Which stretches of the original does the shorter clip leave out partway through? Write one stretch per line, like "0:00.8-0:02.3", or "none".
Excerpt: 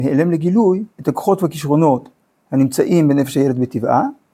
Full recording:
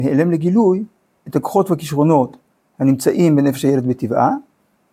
0:00.9-0:01.2